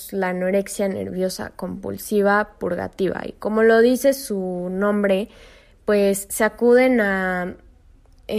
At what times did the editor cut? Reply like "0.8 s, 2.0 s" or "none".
none